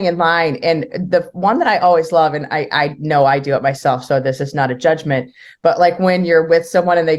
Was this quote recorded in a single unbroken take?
yes; 0 cuts

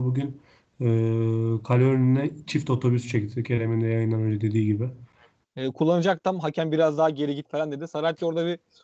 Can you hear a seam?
yes; 1 cut; at 5.4 s

